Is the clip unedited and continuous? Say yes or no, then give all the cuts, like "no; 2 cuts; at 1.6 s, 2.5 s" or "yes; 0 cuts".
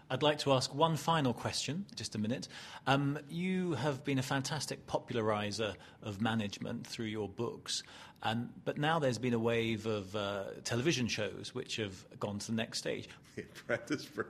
no; 2 cuts; at 2.0 s, 13.2 s